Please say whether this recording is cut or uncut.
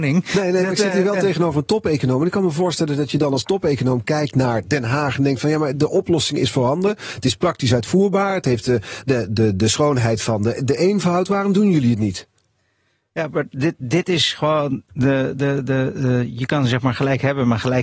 uncut